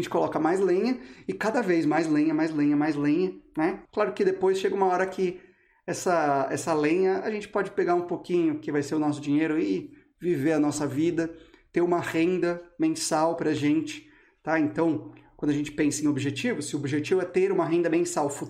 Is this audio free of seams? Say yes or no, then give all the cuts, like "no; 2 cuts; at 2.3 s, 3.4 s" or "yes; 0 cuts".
no; 1 cut; at 3.9 s